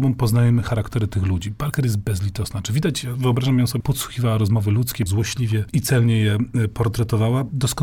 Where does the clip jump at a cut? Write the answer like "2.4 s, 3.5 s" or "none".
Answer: 3.8 s, 5.1 s